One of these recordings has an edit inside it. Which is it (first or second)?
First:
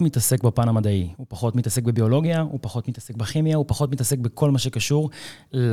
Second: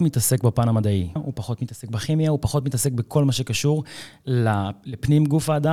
second